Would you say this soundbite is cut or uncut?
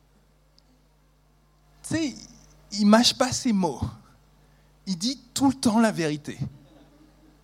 uncut